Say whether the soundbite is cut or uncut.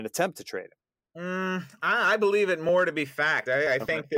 uncut